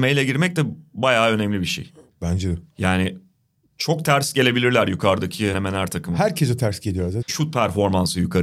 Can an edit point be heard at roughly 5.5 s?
yes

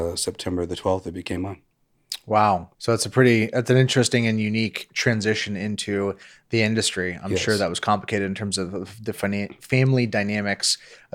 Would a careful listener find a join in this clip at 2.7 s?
yes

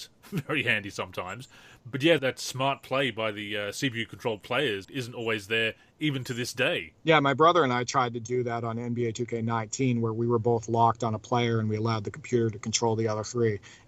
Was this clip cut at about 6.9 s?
yes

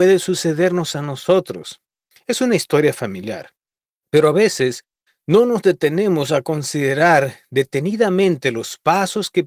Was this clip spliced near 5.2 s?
no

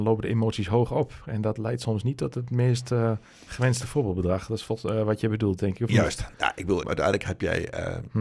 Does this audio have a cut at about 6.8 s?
yes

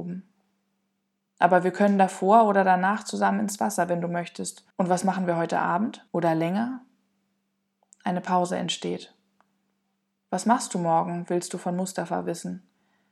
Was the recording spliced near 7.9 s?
no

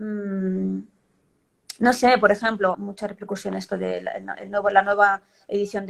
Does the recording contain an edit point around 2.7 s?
yes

